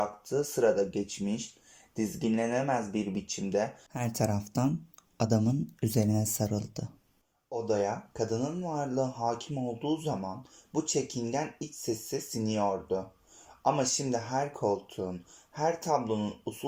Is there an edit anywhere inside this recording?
no; 0 cuts

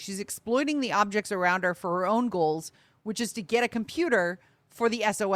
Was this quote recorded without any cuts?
yes; 0 cuts

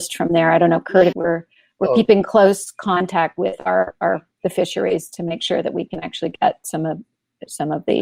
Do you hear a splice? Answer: yes; 1 cut; at 1.1 s

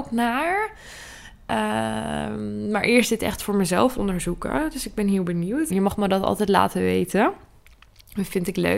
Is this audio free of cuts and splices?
no; 1 cut; at 5.7 s

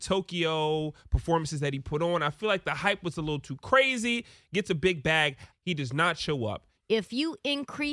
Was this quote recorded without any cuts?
no; 2 cuts; at 5.5 s, 6.7 s

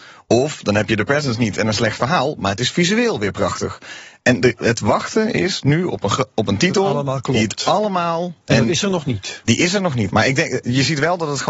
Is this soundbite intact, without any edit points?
no; 2 cuts; at 8.4 s, 10.1 s

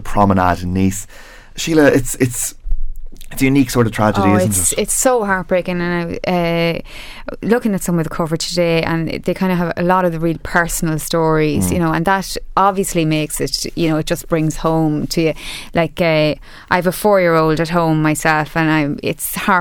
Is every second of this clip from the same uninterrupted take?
yes; 0 cuts

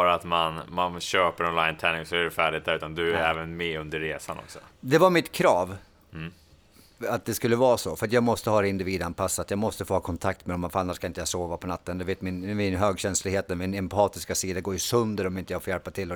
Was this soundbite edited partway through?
no; 0 cuts

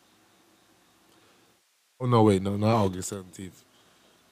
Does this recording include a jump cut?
no; 0 cuts

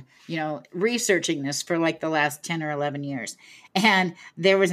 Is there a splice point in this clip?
no; 0 cuts

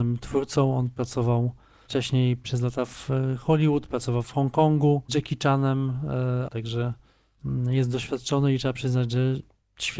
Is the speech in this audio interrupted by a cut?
yes; 2 cuts; at 5.1 s, 6.5 s

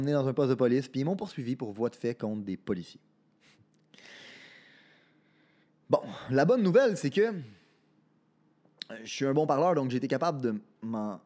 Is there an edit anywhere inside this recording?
no; 0 cuts

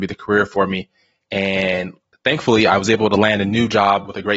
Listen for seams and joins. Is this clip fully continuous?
yes; 0 cuts

